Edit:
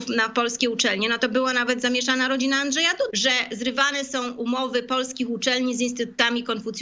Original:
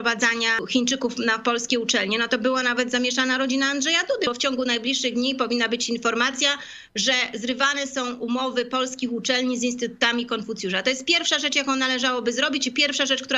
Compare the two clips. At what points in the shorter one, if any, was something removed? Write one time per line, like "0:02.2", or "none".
0:03.1